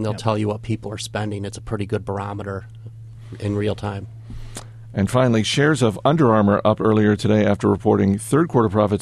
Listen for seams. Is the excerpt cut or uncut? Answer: uncut